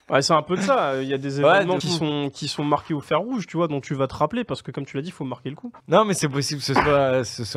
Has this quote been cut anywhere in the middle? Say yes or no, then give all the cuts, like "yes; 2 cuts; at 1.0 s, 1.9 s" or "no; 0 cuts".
yes; 2 cuts; at 1.8 s, 5.8 s